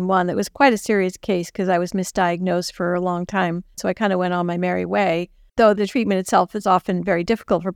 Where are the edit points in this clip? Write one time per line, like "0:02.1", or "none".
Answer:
0:03.8